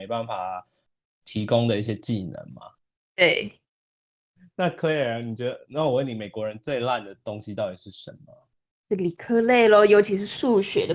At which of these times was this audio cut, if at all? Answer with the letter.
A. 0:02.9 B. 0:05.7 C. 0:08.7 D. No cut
D